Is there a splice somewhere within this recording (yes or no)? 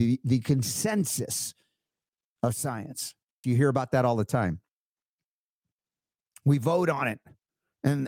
yes